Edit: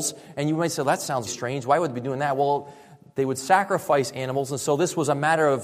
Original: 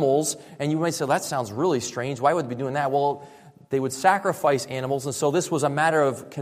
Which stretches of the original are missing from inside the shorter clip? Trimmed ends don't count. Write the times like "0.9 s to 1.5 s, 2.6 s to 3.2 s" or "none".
1.5 s to 1.8 s